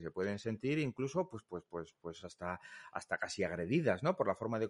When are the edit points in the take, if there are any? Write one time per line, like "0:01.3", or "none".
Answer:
none